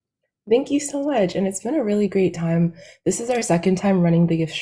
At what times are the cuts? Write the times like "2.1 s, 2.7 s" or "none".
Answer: none

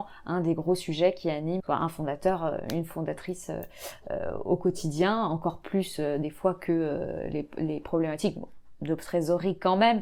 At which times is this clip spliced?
1.6 s

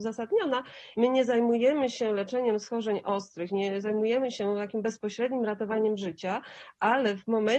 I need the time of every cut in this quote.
0.9 s

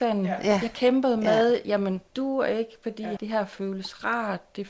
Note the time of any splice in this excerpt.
2.1 s, 3.2 s

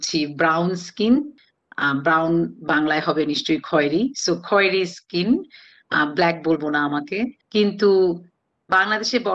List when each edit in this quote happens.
7.4 s

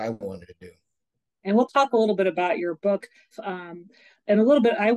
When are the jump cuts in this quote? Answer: 1.3 s, 3.3 s

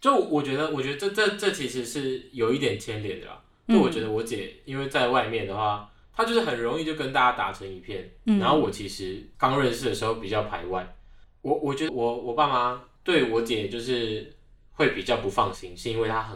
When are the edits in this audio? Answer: 11.9 s

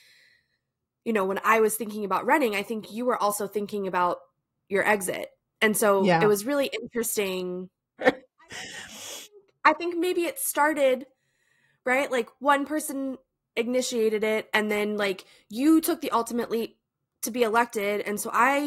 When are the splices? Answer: 8.0 s

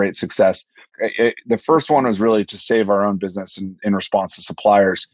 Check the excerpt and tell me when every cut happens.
0.9 s

